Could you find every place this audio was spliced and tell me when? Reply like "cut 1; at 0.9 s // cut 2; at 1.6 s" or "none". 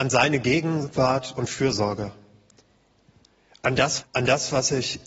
cut 1; at 4.0 s